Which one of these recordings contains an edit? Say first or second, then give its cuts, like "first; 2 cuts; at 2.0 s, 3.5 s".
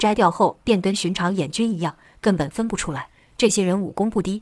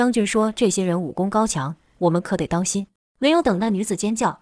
second; 1 cut; at 3.1 s